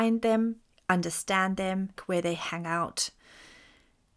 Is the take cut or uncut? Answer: cut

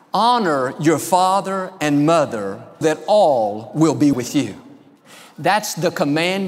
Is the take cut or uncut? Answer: cut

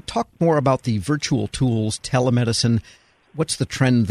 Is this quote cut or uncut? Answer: uncut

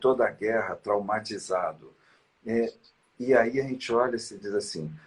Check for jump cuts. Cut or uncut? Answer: uncut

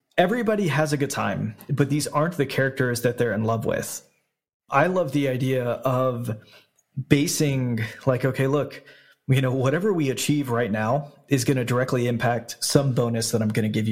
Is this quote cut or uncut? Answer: uncut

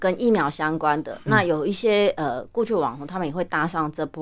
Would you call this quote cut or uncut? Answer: uncut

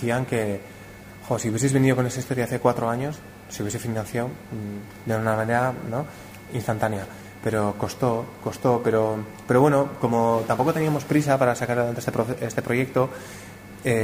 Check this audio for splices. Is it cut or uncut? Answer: uncut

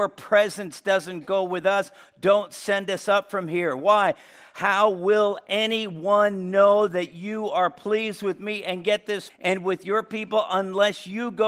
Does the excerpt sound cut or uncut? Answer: cut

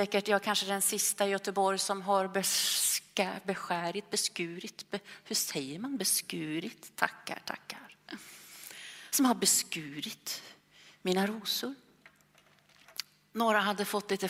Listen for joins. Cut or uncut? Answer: uncut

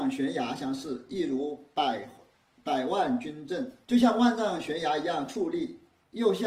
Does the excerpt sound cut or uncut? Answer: cut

